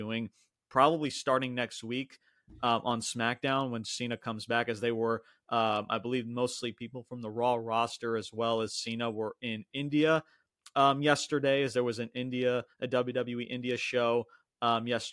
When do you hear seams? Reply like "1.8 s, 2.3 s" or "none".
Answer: none